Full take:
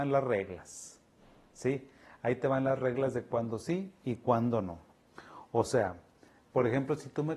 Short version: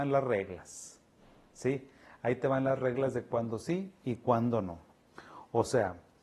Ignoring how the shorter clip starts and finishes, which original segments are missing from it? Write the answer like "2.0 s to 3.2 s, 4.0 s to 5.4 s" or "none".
none